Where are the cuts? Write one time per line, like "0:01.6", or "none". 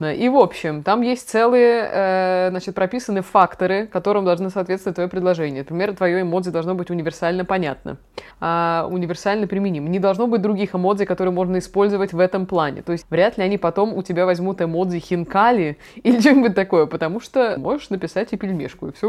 0:08.3
0:13.0
0:17.6